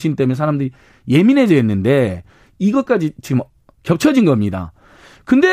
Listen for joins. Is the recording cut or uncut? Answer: uncut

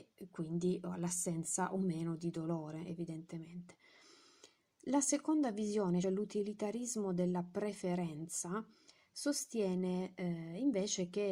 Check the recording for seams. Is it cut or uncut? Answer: cut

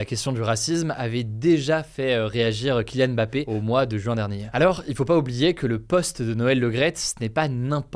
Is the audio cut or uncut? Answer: uncut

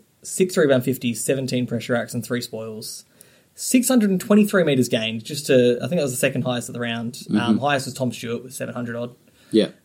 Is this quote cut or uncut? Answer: uncut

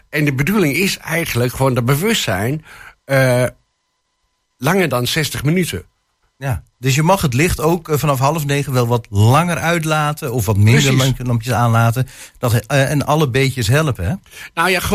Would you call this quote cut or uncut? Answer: uncut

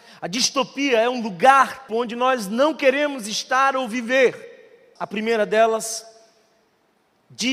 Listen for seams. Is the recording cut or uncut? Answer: cut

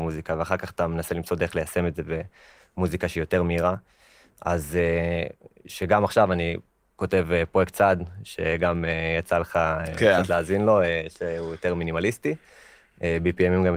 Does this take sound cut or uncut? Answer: uncut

